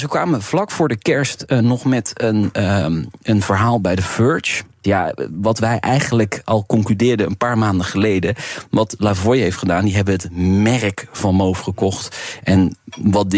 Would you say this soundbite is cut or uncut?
cut